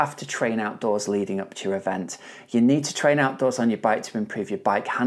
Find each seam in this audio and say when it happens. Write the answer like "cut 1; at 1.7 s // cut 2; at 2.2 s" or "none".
none